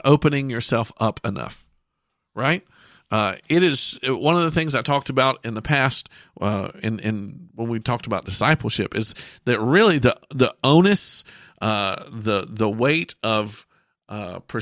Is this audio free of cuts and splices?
yes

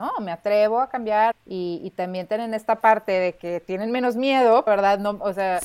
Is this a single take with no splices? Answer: no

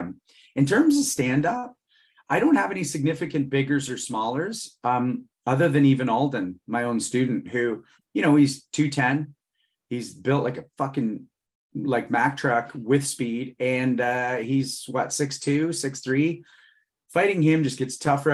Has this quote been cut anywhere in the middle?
no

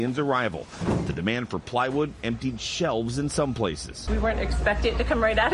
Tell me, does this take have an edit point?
no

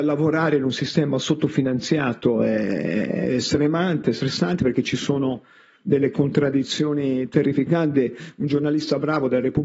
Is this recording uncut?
yes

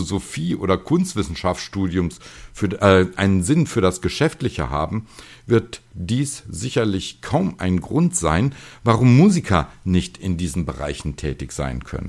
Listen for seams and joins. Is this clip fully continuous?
yes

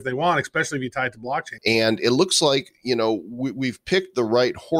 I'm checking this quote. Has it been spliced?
yes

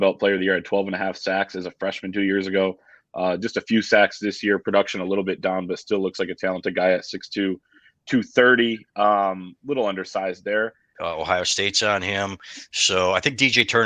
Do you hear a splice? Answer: yes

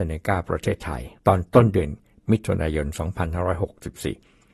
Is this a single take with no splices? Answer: no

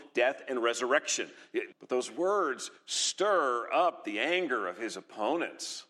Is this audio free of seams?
no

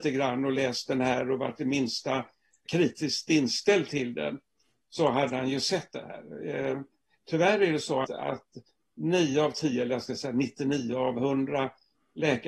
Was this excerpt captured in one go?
no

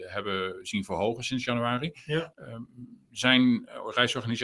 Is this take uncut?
no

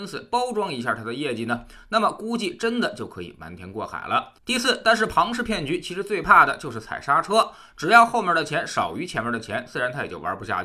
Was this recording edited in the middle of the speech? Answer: no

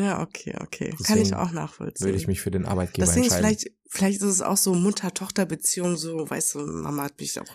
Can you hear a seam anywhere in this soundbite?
no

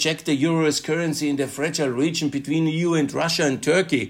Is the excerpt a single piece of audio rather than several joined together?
yes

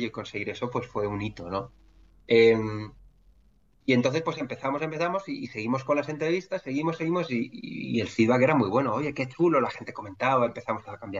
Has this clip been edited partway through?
no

